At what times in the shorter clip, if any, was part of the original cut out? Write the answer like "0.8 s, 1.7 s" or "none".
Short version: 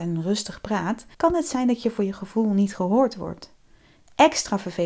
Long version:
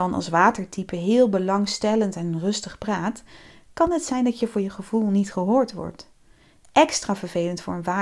1.1 s